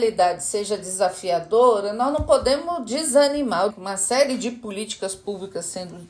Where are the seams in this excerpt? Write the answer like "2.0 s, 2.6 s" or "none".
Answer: 3.7 s